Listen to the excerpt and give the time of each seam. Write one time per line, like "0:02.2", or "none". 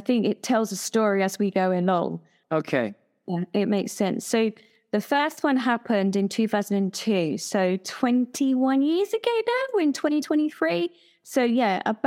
none

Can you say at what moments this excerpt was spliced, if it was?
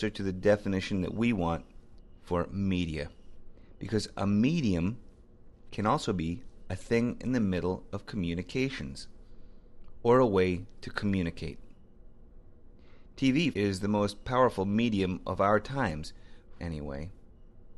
0:13.5
0:16.6

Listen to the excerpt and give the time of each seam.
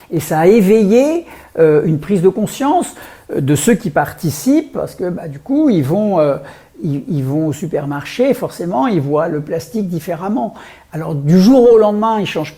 none

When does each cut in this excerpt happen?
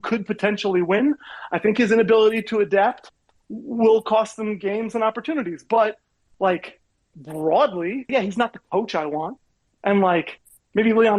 0:08.1

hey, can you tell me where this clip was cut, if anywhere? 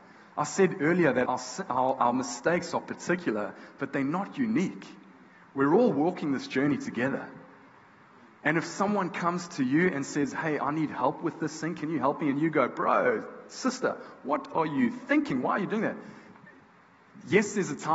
0:01.2

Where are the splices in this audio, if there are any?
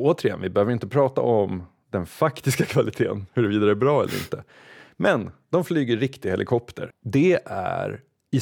0:06.9

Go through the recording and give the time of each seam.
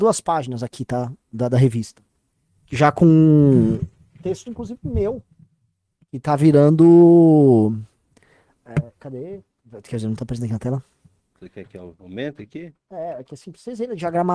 none

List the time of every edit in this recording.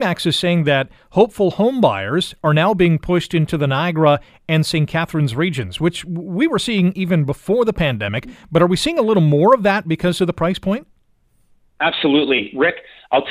none

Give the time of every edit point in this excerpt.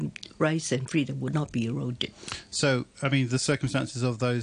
none

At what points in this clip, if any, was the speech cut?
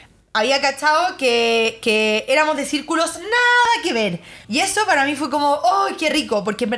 0:04.4

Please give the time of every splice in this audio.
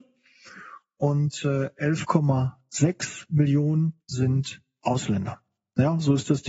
0:04.0

